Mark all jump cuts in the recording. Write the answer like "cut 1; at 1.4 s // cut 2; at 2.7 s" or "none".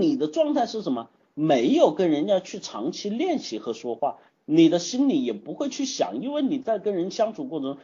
cut 1; at 4.3 s